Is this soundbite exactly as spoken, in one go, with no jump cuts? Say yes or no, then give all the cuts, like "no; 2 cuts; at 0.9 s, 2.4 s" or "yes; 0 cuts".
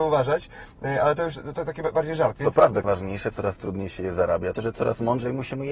no; 2 cuts; at 2.8 s, 4.5 s